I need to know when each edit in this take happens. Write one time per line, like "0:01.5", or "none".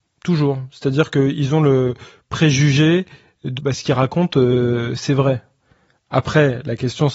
0:03.6